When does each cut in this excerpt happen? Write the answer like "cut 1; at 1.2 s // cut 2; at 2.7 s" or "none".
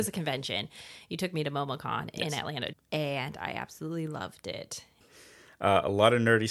cut 1; at 2.7 s // cut 2; at 5.0 s